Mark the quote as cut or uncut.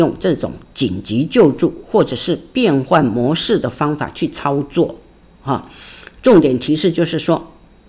uncut